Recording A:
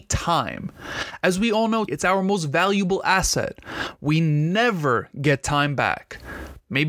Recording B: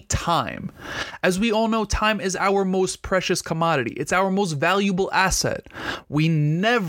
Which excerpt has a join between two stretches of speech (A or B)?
A